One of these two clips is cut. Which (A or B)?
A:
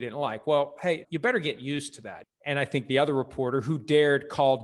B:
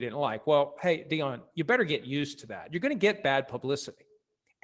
A